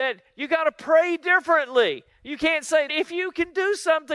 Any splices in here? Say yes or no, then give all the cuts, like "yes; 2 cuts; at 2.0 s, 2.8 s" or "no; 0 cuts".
yes; 1 cut; at 2.9 s